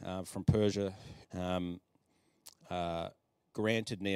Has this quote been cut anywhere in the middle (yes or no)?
yes